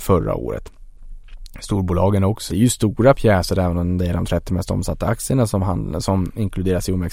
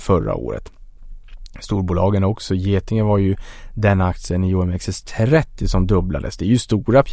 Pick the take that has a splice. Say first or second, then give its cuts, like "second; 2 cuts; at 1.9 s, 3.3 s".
first; 1 cut; at 2.5 s